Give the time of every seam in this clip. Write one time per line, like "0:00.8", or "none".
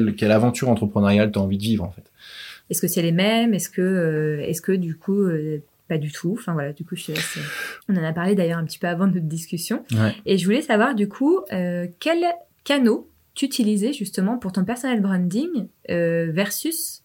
0:02.6
0:07.8